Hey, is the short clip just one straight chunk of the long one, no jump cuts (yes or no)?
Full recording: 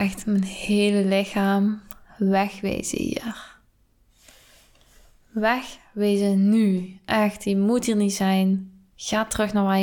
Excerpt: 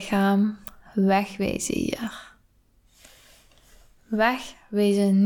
yes